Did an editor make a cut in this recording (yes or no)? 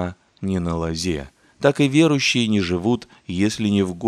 no